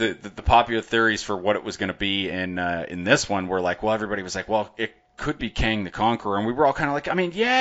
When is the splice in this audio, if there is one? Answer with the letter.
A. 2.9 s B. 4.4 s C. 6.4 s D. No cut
D